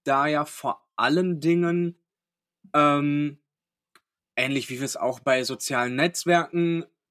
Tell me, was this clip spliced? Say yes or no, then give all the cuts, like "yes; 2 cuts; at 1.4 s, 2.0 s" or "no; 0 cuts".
no; 0 cuts